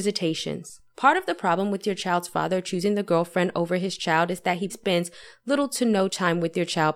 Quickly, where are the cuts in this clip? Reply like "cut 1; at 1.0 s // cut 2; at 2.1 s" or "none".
cut 1; at 4.7 s